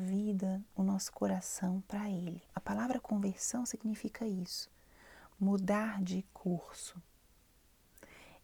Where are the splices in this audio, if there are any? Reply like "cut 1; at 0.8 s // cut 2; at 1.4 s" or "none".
cut 1; at 2.5 s